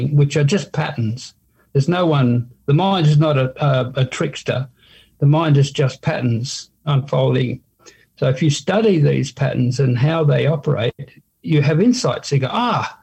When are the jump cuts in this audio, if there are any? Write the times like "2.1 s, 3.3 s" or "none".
none